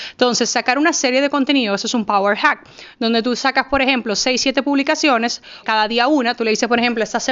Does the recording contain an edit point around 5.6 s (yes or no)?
yes